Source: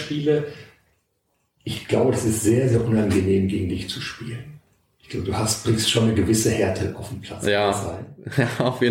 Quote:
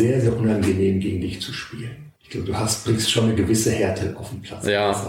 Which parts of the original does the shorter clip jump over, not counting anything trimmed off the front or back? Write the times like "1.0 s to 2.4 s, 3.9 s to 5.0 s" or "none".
4.6 s to 5.0 s